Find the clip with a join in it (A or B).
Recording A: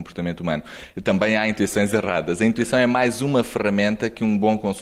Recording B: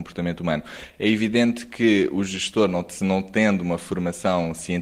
A